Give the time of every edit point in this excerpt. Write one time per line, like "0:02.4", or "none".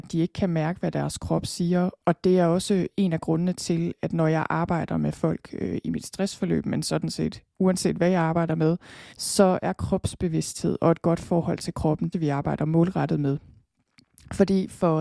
0:09.1
0:12.1